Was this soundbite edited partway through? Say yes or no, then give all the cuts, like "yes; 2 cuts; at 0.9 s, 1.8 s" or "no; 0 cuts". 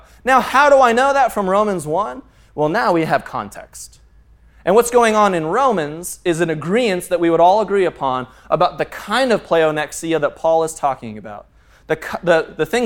no; 0 cuts